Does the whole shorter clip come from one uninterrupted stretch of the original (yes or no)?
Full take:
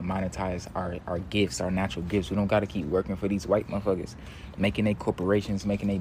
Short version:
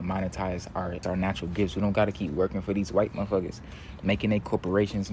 no